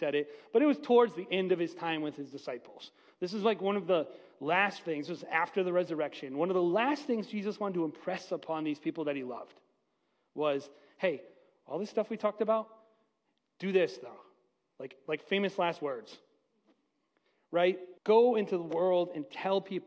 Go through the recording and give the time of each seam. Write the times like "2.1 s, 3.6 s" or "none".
18.0 s